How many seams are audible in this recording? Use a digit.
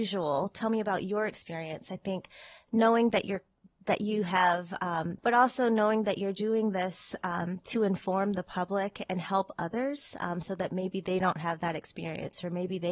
1